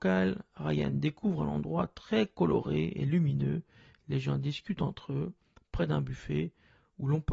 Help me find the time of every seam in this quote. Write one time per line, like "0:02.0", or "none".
none